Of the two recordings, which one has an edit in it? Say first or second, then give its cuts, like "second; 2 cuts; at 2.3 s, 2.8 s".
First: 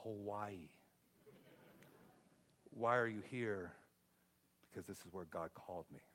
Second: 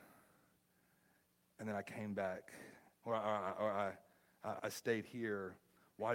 second; 1 cut; at 4.6 s